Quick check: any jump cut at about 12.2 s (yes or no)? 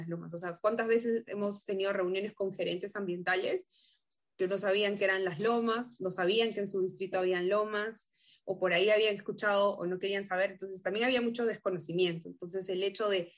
no